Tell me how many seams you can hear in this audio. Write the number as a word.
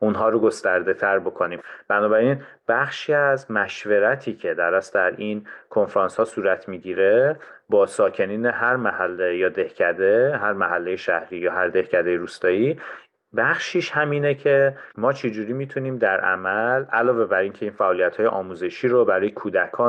one